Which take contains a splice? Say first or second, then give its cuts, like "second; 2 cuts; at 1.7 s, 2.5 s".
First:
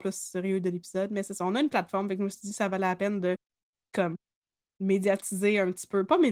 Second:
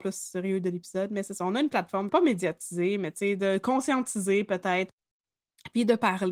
second; 1 cut; at 2.1 s